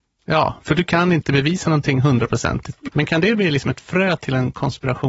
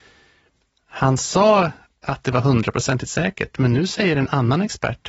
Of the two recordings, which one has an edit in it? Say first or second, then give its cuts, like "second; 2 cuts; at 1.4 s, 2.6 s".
first; 1 cut; at 2.9 s